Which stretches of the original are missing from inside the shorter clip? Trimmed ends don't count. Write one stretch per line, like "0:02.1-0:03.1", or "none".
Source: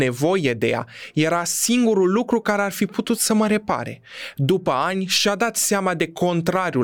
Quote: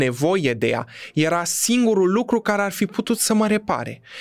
none